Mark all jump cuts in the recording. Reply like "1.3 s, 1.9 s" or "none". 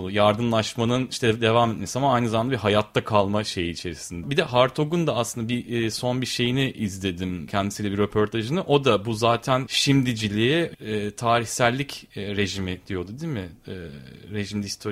4.2 s